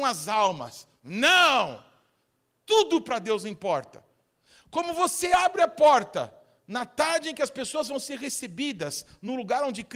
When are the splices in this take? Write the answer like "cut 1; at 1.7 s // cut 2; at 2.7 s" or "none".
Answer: none